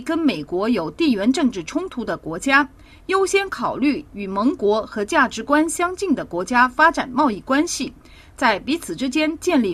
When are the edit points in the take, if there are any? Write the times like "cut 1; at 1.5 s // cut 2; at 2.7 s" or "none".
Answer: none